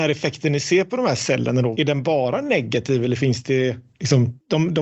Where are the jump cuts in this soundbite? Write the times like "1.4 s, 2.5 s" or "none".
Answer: 1.7 s